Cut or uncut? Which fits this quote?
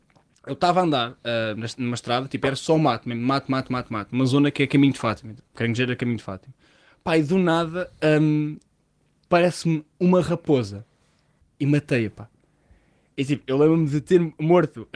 cut